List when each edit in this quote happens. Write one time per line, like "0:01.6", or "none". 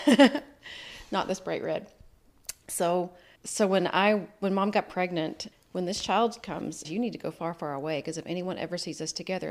0:03.4
0:05.5
0:06.8